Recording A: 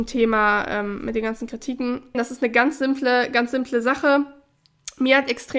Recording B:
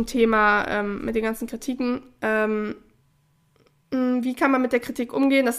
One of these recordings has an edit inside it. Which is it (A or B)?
A